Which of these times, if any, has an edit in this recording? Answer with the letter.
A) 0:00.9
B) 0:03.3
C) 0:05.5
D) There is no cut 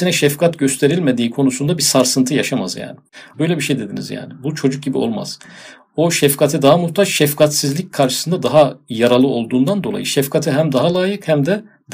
B